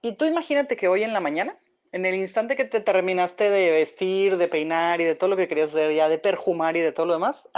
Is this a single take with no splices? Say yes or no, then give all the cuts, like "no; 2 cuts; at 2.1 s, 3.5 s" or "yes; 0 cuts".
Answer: yes; 0 cuts